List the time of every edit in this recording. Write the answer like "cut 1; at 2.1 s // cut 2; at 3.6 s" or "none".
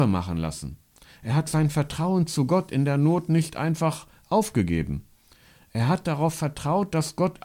none